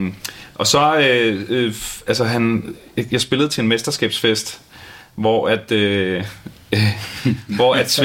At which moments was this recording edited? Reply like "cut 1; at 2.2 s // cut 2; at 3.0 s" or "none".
none